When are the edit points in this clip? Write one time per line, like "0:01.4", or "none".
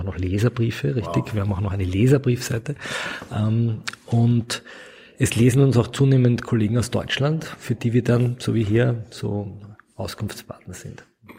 none